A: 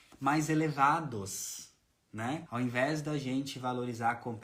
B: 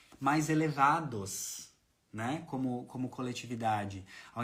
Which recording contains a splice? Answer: A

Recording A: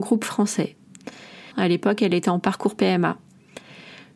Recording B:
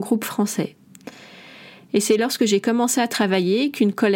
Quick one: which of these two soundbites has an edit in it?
A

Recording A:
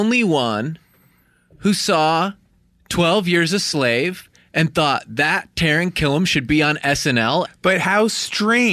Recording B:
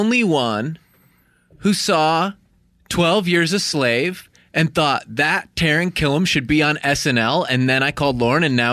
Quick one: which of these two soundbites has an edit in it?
A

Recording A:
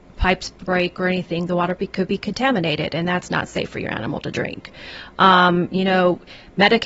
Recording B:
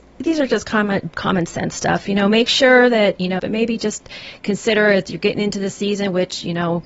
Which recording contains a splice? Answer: B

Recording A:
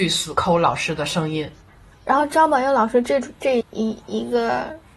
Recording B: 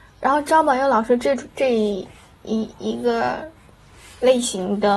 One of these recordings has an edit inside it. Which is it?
A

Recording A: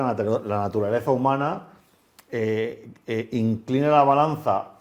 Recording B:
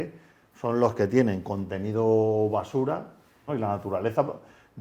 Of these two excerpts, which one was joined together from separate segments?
B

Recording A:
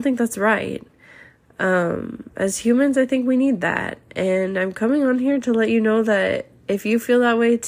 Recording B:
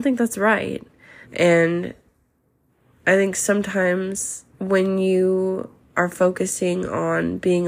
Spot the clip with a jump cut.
B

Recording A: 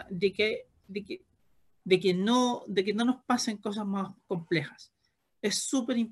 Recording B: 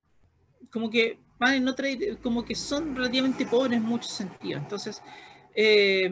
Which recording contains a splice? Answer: A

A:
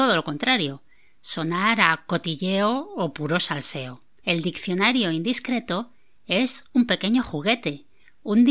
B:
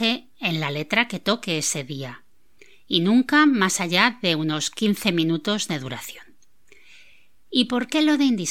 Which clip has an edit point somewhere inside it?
A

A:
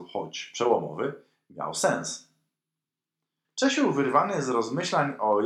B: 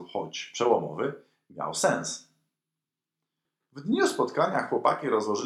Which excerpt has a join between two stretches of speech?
A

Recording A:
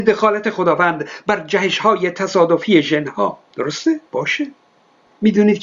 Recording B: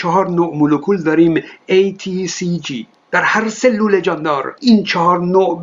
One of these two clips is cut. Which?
A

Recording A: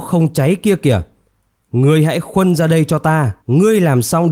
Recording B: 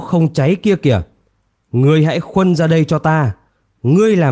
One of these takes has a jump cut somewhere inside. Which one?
A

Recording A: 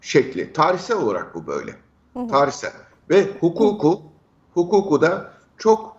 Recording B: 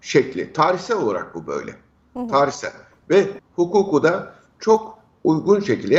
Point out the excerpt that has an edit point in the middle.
B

